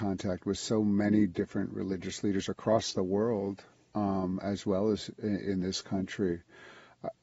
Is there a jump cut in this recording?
no; 0 cuts

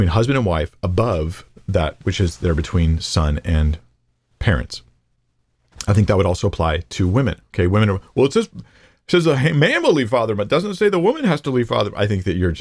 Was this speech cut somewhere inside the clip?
no; 0 cuts

